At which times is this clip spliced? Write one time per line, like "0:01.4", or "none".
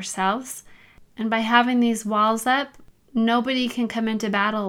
none